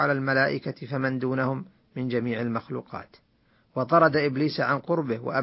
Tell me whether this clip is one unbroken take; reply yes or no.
yes